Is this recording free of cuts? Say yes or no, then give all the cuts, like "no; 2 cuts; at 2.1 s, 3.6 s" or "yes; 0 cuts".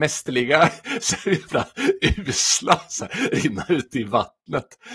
yes; 0 cuts